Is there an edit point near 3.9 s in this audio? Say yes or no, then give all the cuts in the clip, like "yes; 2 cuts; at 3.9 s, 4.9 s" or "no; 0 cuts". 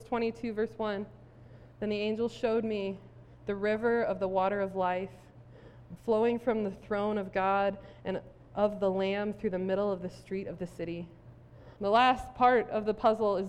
no; 2 cuts; at 6.0 s, 11.8 s